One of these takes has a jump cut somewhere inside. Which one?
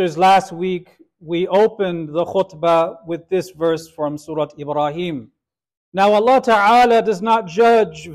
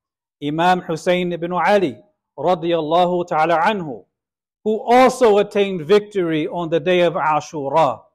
first; 1 cut; at 5.8 s

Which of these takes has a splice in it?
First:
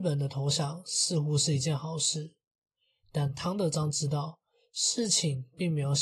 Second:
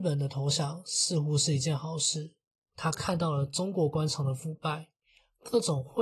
second; 1 cut; at 2.7 s

